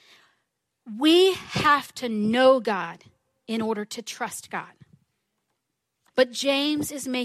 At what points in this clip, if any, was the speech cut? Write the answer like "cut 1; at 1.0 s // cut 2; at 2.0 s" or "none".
cut 1; at 6.1 s